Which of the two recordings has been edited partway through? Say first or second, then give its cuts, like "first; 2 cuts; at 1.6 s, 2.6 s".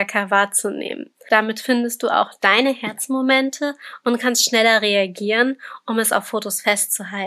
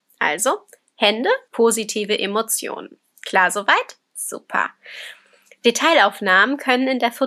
second; 1 cut; at 1.5 s